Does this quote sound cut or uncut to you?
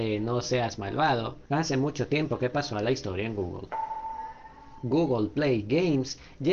uncut